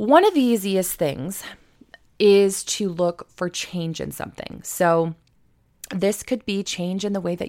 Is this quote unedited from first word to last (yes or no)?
yes